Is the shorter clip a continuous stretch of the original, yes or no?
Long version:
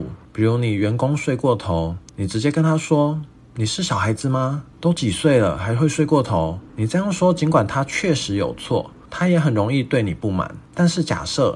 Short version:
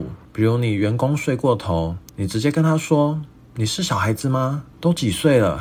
yes